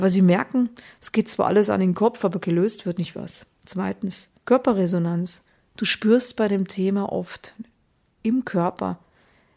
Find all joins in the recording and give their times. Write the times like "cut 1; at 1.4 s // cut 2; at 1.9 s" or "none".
cut 1; at 3.1 s // cut 2; at 4.4 s